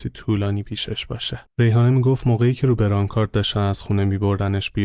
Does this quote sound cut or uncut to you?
cut